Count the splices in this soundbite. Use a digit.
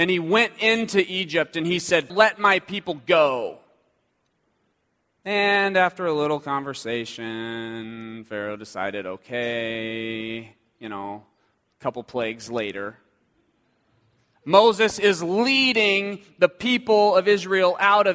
1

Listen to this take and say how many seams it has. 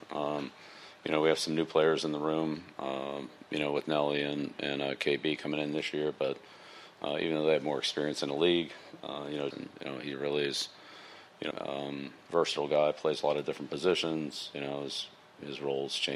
2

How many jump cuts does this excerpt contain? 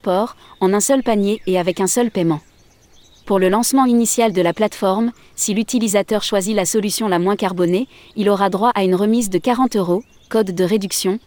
1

